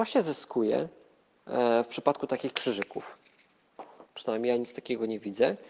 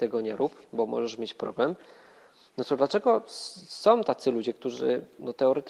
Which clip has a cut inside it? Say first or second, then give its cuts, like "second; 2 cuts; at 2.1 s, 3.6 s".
first; 1 cut; at 4.0 s